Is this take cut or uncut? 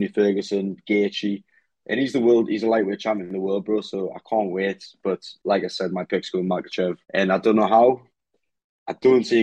cut